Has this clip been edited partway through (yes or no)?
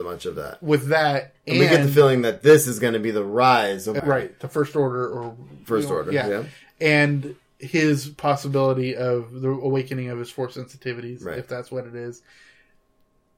yes